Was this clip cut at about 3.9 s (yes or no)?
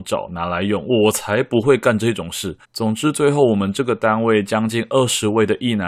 no